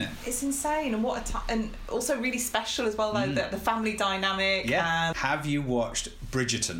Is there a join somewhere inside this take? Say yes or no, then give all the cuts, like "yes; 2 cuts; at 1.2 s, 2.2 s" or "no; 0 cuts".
yes; 1 cut; at 5.1 s